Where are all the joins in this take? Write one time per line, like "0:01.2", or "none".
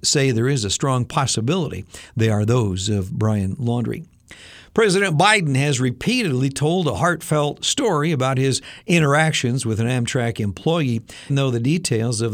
0:11.3